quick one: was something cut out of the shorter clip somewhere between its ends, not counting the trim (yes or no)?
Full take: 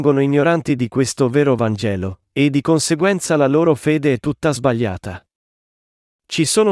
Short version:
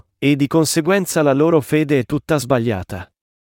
no